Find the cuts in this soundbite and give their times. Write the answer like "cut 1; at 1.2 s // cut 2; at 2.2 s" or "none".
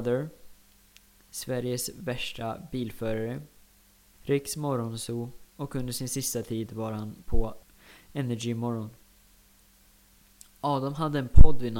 cut 1; at 4.1 s // cut 2; at 5.5 s